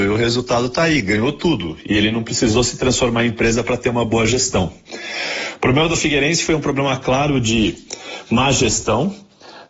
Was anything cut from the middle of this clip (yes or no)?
no